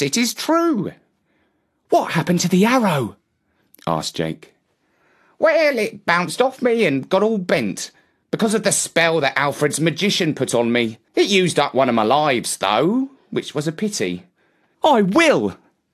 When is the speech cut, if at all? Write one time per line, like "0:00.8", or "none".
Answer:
0:11.1
0:14.7